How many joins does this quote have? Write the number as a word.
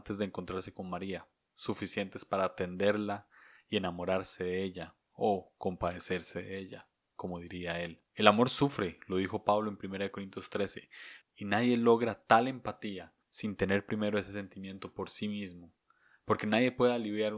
three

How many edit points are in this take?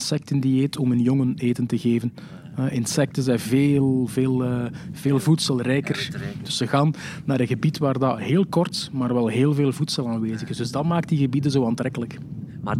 one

